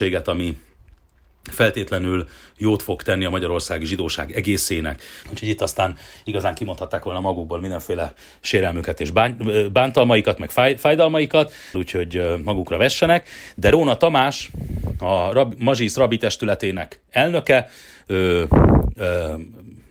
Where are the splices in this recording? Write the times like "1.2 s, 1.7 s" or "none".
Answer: 5.2 s, 11.7 s